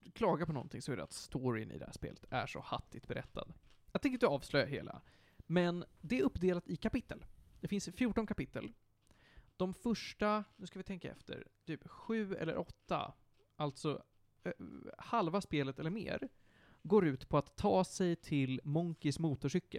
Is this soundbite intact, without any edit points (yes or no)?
yes